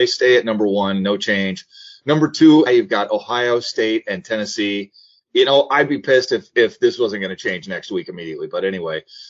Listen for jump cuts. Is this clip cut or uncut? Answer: cut